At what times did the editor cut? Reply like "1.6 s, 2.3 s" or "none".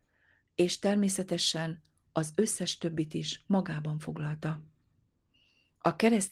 none